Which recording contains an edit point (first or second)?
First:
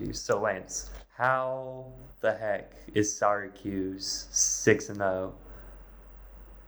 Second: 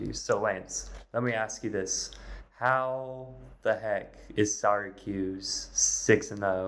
first